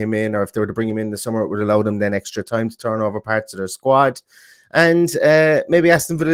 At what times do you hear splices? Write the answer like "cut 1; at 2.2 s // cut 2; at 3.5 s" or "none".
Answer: none